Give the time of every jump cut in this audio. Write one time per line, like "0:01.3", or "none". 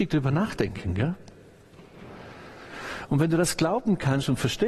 none